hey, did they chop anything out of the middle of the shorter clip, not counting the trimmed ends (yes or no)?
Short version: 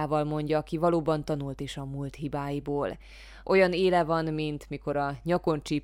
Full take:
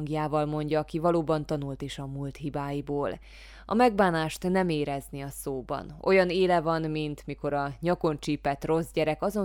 yes